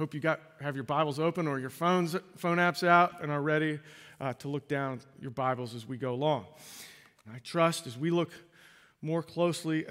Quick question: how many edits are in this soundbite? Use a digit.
1